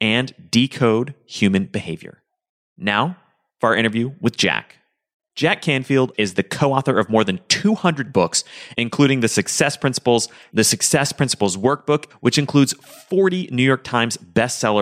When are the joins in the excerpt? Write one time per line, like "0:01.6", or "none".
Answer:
0:06.1
0:10.5
0:12.1